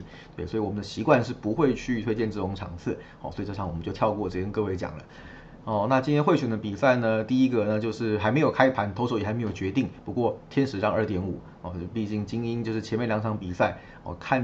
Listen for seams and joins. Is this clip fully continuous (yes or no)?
yes